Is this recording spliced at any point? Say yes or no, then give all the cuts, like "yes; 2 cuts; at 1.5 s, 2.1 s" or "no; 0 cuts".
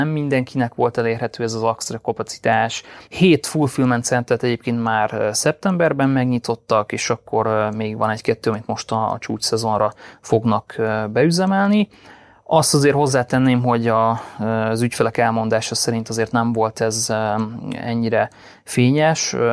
yes; 1 cut; at 3.1 s